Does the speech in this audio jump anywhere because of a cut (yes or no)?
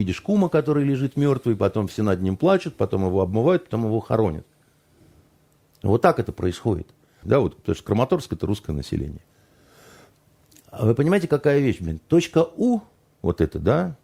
yes